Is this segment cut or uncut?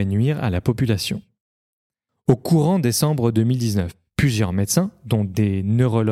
cut